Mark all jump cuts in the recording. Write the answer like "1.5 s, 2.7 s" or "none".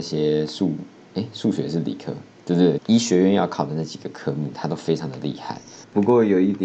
2.8 s

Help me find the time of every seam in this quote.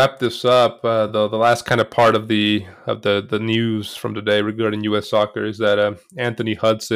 none

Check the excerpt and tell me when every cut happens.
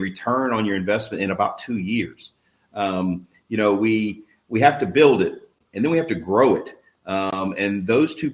none

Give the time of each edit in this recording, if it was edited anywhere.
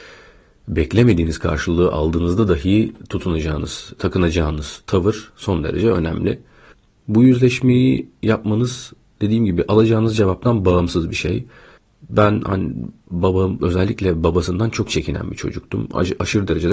4.0 s

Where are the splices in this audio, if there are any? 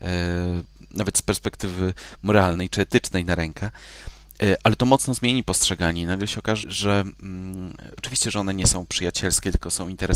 6.6 s, 8.0 s

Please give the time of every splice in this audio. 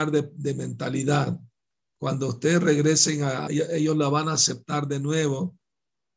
3.5 s

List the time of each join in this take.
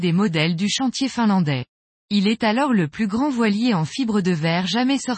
1.9 s

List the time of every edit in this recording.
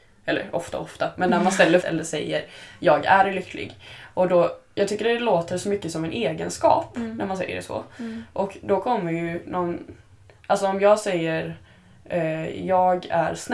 1.8 s

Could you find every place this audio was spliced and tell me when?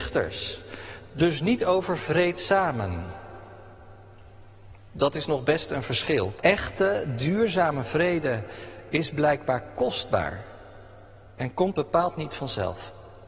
6.4 s

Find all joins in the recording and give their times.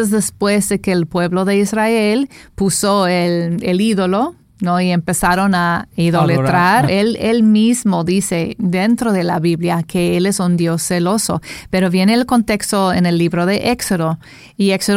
6.9 s

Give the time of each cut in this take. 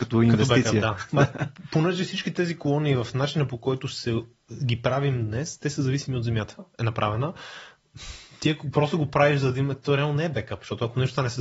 6.6 s

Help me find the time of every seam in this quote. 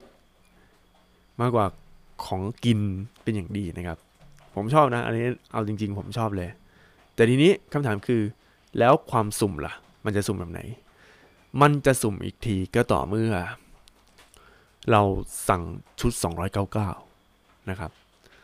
none

